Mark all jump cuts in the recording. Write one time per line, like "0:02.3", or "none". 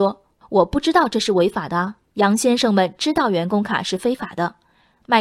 0:02.1